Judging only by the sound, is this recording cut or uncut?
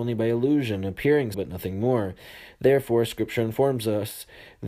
cut